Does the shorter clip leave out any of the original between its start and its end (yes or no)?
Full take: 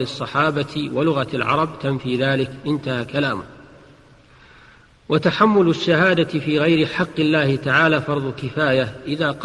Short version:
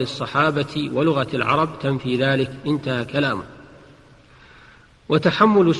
no